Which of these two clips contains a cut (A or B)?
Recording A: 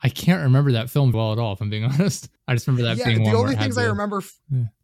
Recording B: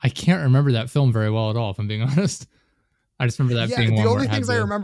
A